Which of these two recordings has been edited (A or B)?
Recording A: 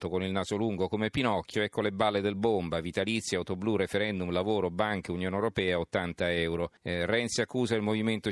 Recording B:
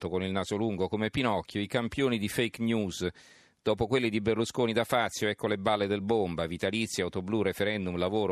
A